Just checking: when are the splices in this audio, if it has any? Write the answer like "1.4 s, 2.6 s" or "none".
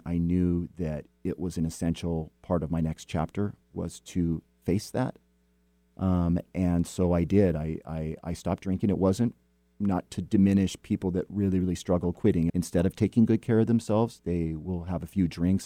12.5 s